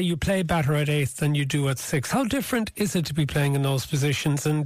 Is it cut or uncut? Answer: uncut